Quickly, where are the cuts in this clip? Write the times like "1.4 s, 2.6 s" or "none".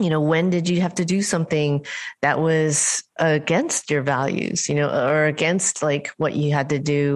none